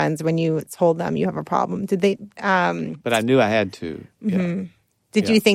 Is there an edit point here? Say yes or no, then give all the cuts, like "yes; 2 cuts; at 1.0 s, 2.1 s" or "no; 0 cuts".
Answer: yes; 1 cut; at 2.4 s